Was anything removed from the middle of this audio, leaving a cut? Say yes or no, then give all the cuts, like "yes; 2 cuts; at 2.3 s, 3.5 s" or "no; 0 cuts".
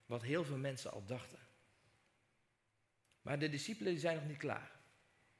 no; 0 cuts